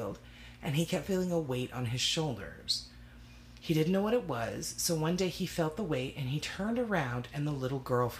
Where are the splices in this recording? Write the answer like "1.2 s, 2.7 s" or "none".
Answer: none